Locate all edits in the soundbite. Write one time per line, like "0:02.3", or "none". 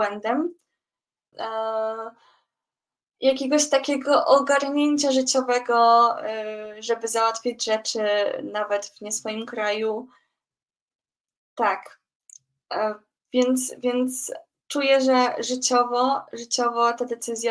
0:01.3